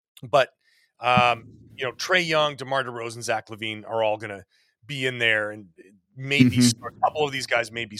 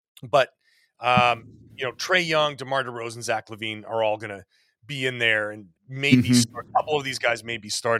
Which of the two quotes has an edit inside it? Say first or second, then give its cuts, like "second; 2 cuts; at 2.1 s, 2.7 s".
second; 1 cut; at 5.8 s